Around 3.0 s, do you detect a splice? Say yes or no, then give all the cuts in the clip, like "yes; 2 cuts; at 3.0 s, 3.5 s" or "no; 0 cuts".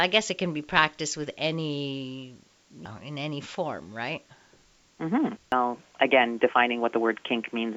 no; 1 cut; at 5.4 s